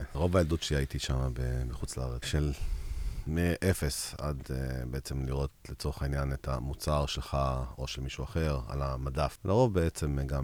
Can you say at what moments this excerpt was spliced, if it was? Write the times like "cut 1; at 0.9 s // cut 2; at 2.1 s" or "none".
cut 1; at 2.2 s